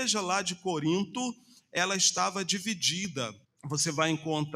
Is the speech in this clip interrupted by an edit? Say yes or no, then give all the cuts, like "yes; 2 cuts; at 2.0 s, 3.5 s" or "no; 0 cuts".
yes; 1 cut; at 3.4 s